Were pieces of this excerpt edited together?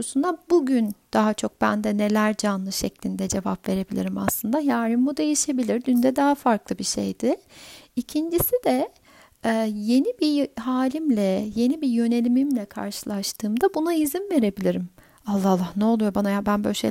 no; 0 cuts

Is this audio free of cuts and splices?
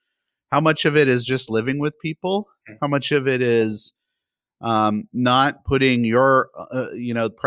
yes; 0 cuts

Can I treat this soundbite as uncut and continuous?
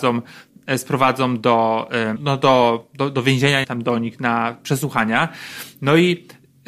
no; 2 cuts; at 2.2 s, 3.6 s

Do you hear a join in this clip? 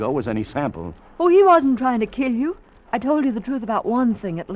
yes; 1 cut; at 2.9 s

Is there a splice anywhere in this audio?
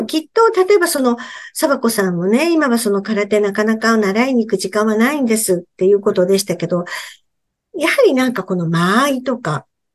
no; 0 cuts

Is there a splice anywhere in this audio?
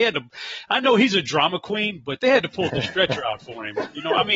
yes; 1 cut; at 2.7 s

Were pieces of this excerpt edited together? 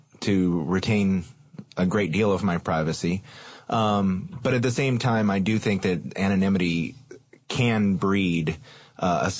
no; 0 cuts

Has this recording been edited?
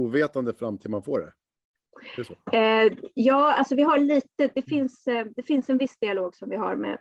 yes; 1 cut; at 4.5 s

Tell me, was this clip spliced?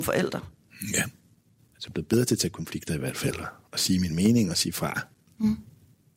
yes; 1 cut; at 1.6 s

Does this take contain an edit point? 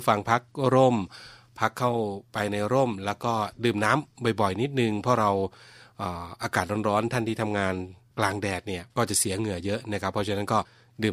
yes; 1 cut; at 8.9 s

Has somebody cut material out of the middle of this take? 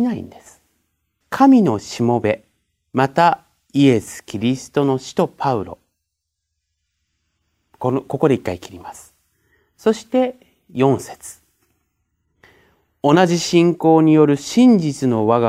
yes; 1 cut; at 1.2 s

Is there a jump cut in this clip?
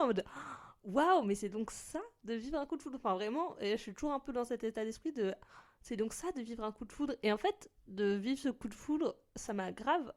no; 0 cuts

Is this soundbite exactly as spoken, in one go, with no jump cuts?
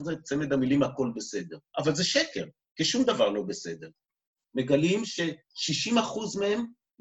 no; 2 cuts; at 1.7 s, 4.4 s

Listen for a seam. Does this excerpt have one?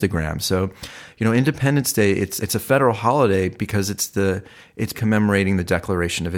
yes; 2 cuts; at 2.4 s, 4.9 s

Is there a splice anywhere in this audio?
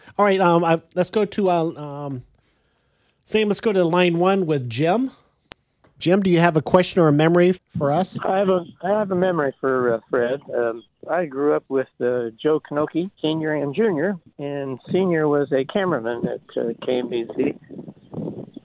yes; 2 cuts; at 7.5 s, 13.2 s

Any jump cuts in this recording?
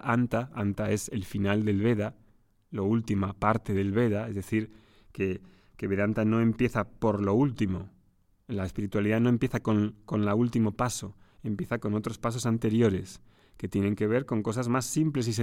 no; 0 cuts

